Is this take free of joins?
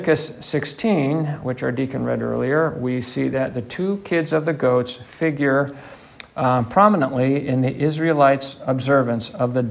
yes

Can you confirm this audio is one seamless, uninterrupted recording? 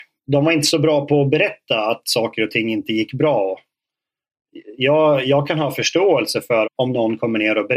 no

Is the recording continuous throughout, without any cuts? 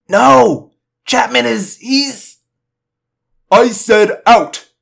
yes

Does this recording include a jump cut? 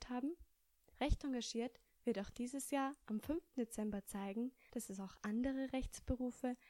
yes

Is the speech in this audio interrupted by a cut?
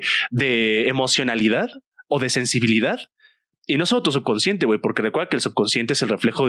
no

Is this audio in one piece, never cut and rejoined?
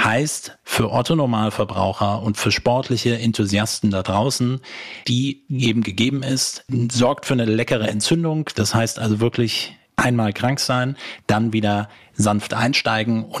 no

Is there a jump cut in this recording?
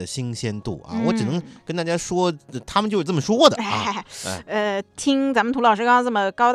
no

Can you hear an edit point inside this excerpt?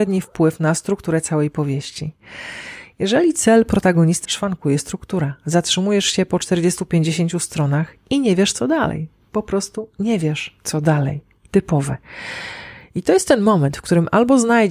yes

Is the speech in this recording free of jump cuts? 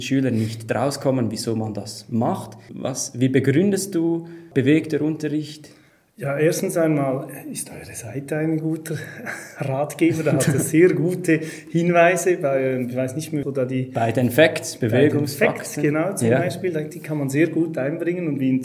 no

